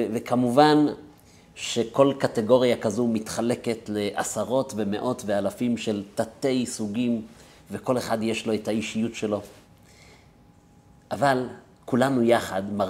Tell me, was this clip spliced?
no; 0 cuts

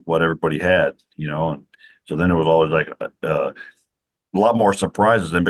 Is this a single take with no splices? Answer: yes; 0 cuts

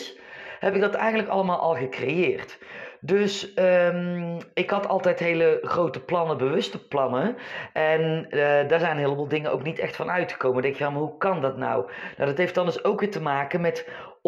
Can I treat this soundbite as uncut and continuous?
yes; 0 cuts

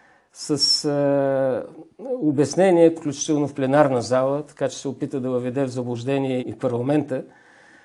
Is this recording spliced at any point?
yes; 2 cuts; at 3.0 s, 6.4 s

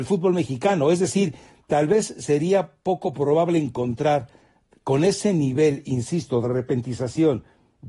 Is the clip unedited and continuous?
yes; 0 cuts

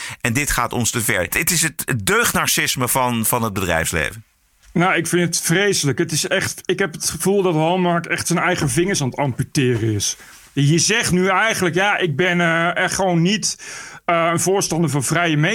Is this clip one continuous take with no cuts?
yes; 0 cuts

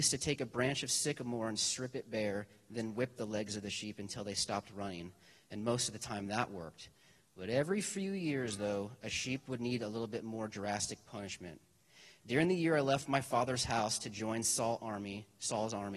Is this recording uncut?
yes; 0 cuts

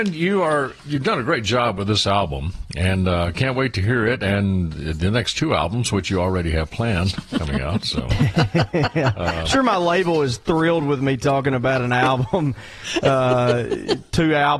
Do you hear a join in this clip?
no; 0 cuts

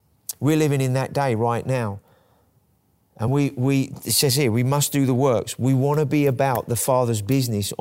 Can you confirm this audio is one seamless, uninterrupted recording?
yes; 0 cuts

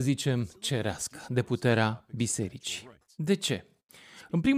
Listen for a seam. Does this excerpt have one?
no; 0 cuts

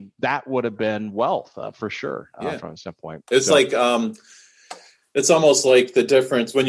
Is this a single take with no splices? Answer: yes; 0 cuts

